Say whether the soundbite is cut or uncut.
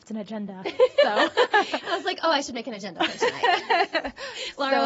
uncut